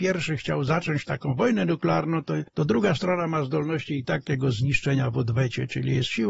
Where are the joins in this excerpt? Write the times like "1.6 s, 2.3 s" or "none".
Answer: none